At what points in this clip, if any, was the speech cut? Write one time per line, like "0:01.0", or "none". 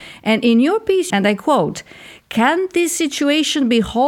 0:01.1